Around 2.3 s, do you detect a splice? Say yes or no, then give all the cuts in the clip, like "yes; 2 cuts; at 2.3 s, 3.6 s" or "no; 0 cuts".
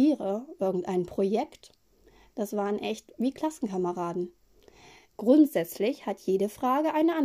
no; 1 cut; at 5.1 s